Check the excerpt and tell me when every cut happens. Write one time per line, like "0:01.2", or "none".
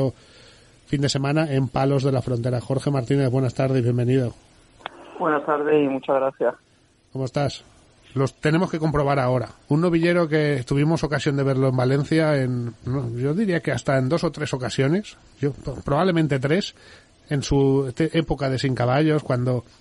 0:07.9
0:09.6
0:12.8